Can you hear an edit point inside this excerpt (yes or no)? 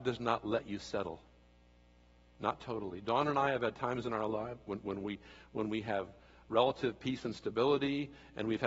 no